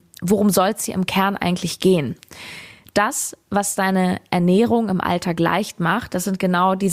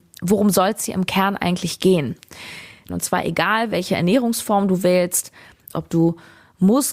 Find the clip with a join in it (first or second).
second